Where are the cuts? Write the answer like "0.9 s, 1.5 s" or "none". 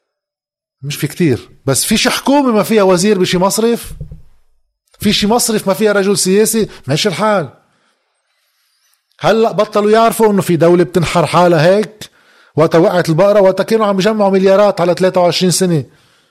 0.9 s